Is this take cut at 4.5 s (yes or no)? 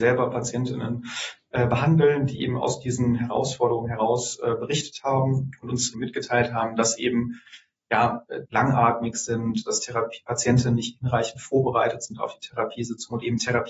no